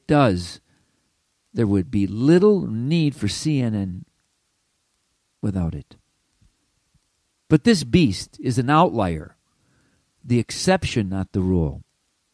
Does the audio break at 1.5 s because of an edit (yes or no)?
no